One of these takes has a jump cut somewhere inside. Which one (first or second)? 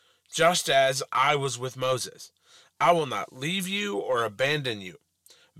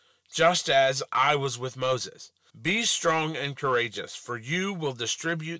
second